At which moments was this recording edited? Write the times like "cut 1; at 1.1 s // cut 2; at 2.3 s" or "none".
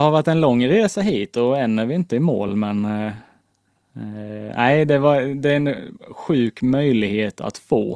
none